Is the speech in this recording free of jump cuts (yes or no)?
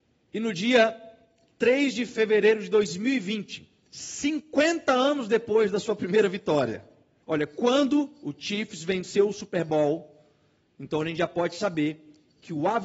no